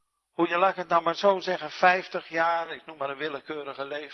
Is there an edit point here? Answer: no; 0 cuts

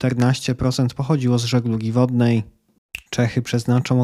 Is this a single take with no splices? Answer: no; 1 cut; at 3.1 s

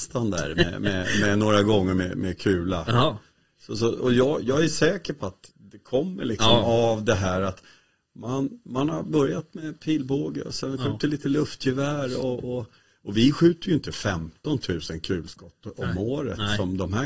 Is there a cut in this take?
no; 0 cuts

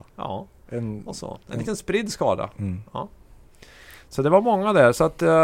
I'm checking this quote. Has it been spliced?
no; 0 cuts

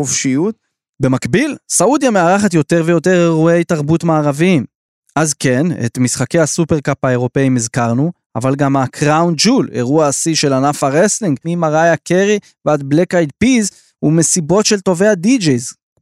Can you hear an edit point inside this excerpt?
yes; 1 cut; at 11.4 s

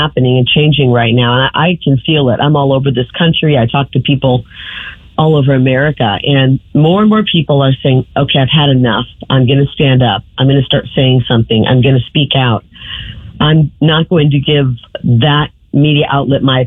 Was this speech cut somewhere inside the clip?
no; 0 cuts

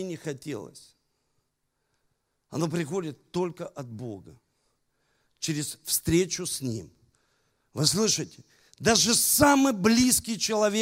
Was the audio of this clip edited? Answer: no; 0 cuts

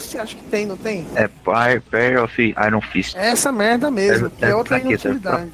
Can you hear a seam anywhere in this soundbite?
no; 0 cuts

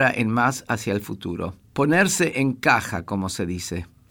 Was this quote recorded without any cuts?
yes; 0 cuts

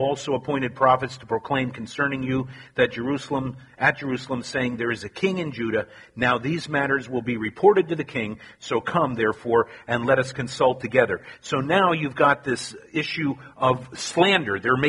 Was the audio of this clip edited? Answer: no; 0 cuts

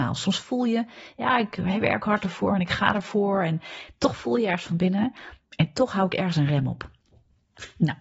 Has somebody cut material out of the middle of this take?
yes; 1 cut; at 5.4 s

